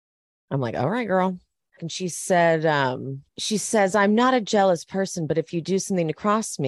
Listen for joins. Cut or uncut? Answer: cut